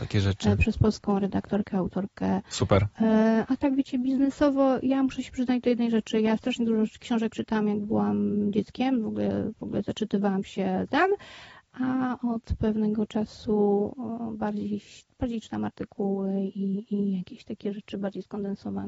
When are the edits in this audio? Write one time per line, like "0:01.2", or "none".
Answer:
none